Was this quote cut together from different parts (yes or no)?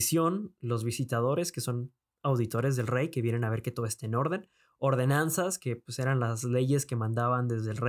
no